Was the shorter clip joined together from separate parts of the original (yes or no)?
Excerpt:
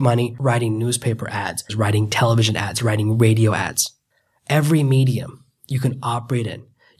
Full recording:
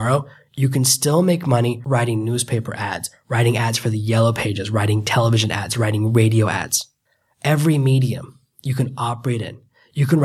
yes